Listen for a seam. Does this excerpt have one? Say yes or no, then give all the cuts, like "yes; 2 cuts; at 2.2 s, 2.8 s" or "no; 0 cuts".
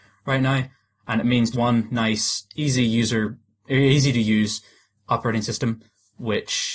yes; 1 cut; at 1.5 s